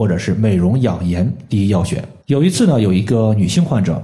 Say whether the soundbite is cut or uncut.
cut